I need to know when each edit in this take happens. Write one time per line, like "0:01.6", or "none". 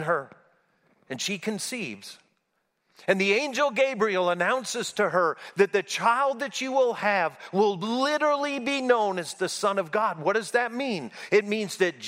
none